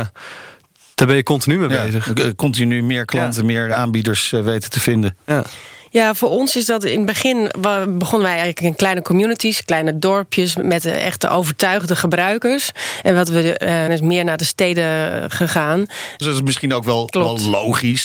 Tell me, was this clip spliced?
yes; 2 cuts; at 13.9 s, 16.2 s

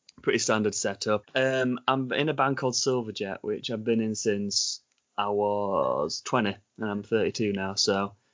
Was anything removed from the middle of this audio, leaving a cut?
yes; 1 cut; at 1.2 s

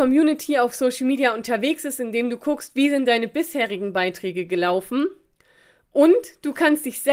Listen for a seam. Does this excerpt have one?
no; 0 cuts

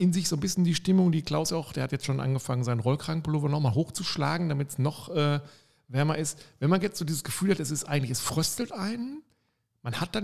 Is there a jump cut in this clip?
no; 0 cuts

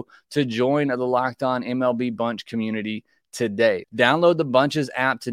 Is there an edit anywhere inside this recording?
yes; 1 cut; at 3.8 s

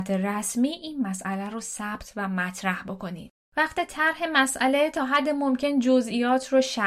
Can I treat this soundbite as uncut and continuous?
yes; 0 cuts

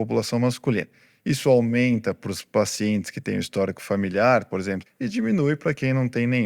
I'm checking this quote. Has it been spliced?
yes; 1 cut; at 4.9 s

